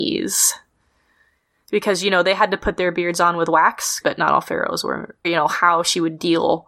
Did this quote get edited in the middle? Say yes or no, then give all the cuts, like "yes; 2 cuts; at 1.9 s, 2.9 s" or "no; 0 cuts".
yes; 2 cuts; at 4.0 s, 5.2 s